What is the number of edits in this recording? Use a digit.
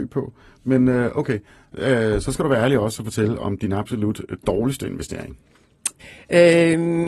1